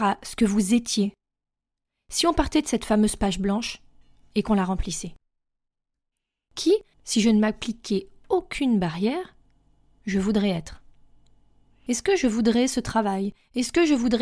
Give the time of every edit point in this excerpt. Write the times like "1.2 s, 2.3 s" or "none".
6.9 s